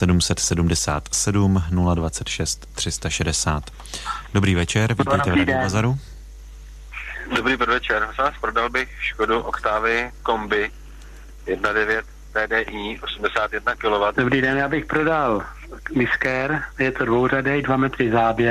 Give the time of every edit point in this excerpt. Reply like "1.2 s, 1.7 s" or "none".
7.3 s, 14.1 s